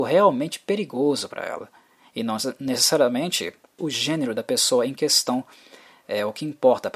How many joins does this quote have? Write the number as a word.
one